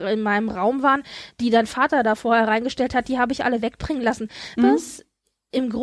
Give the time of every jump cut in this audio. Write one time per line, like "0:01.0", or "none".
0:04.6